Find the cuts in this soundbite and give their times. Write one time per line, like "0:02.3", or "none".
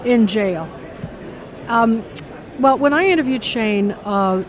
none